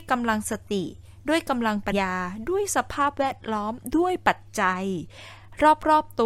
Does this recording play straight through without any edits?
no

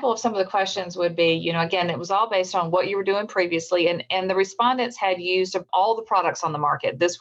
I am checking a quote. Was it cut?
no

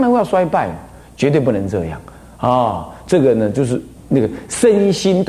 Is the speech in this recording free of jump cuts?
no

